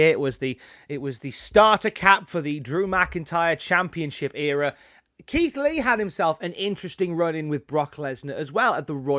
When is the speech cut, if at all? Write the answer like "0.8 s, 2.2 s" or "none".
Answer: none